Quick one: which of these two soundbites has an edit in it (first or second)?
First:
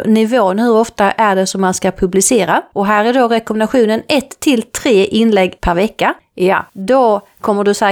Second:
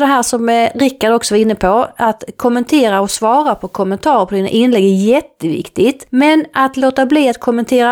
first